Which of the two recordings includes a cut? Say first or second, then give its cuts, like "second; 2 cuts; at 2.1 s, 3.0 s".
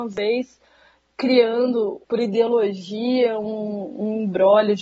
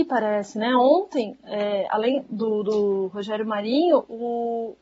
first; 1 cut; at 2.0 s